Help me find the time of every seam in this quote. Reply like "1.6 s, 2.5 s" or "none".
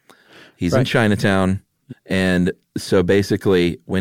1.9 s